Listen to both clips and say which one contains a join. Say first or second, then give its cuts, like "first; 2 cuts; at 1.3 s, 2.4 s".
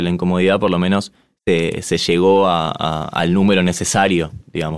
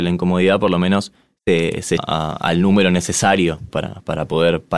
second; 2 cuts; at 2.0 s, 3.7 s